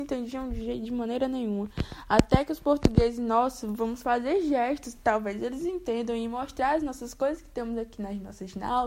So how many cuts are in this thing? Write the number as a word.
zero